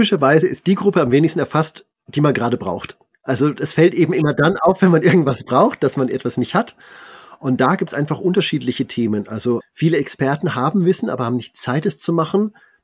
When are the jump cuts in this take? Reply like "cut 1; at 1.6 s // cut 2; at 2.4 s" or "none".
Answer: cut 1; at 9.6 s